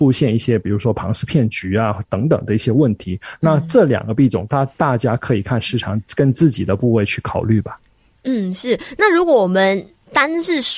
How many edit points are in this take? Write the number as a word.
zero